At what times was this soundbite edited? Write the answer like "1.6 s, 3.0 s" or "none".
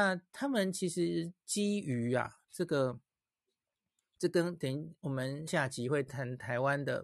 5.5 s